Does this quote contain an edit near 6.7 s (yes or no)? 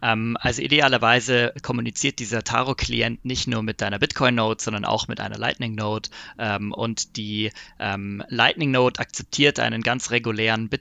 no